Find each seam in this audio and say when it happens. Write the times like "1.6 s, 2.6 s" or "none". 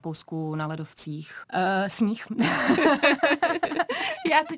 1.4 s

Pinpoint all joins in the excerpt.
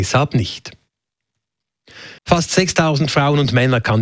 2.2 s

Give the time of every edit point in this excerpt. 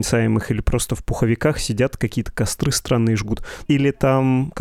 3.7 s

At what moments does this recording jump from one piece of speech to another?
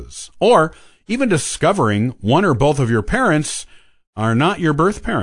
none

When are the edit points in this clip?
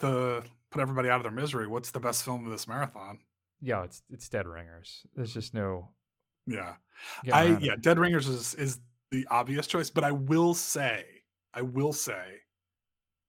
none

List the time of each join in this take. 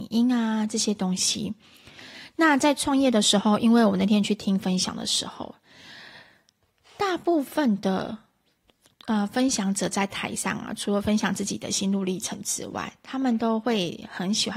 none

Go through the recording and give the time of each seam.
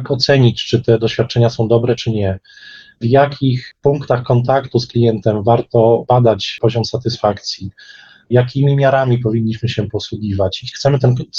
none

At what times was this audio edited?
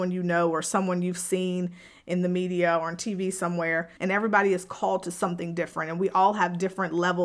4.0 s

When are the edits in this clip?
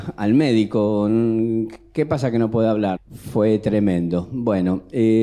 3.0 s

